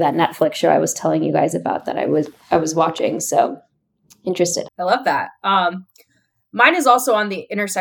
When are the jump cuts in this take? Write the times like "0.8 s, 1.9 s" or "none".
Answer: 4.7 s